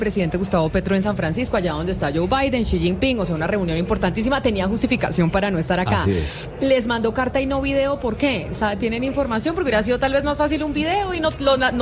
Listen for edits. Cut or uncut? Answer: uncut